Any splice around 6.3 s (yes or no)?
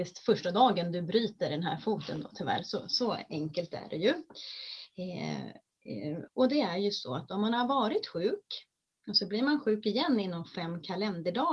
yes